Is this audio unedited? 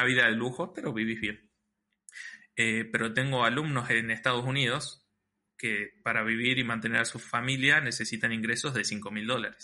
yes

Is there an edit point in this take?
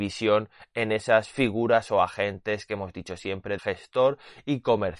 yes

